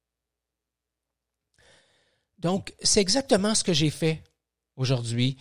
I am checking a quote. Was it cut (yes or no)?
no